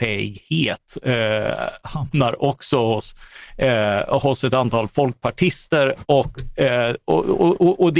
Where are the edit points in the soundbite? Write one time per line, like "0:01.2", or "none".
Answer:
0:06.0